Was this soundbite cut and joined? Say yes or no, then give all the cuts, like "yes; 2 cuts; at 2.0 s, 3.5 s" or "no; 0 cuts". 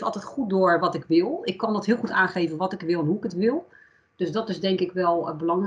no; 0 cuts